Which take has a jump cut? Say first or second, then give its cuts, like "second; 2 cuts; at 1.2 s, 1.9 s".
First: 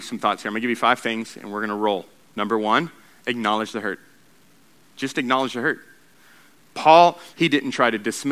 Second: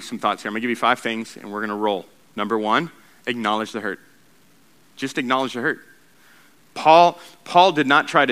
first; 1 cut; at 7.3 s